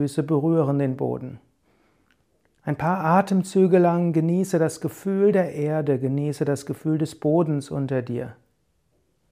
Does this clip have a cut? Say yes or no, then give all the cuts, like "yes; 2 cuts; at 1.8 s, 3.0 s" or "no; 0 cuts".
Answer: no; 0 cuts